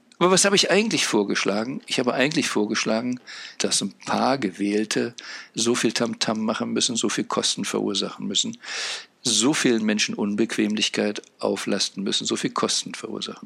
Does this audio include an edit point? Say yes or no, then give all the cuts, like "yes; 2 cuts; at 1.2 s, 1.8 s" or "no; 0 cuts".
yes; 1 cut; at 3.6 s